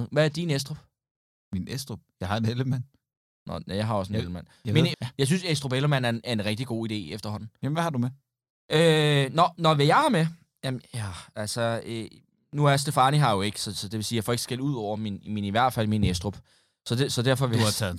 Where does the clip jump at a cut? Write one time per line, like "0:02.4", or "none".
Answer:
0:04.9